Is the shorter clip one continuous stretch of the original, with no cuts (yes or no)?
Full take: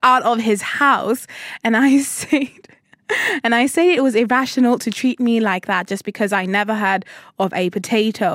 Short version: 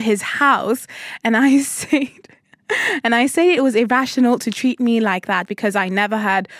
no